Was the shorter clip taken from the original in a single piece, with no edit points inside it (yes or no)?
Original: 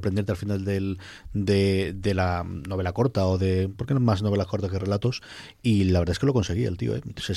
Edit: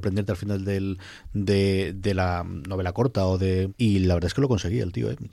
no